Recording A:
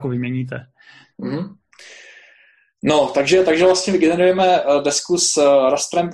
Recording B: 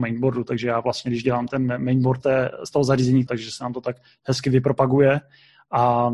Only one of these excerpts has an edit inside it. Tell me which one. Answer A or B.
B